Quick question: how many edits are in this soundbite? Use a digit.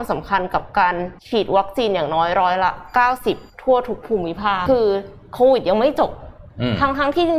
3